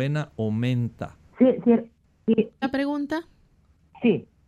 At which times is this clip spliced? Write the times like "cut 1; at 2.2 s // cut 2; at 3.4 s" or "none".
cut 1; at 1.3 s // cut 2; at 2.6 s